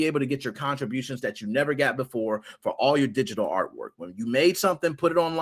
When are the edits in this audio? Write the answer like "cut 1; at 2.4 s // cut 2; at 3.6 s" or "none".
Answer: none